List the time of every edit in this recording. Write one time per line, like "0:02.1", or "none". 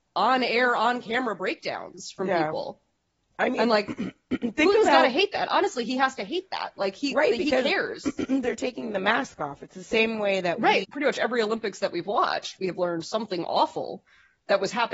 0:10.8